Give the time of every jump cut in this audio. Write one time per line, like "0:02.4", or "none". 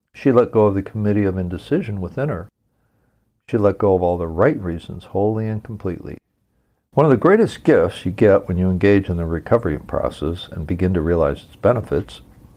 0:06.8